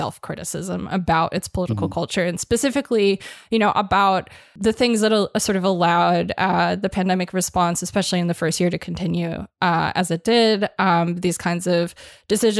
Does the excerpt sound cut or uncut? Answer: uncut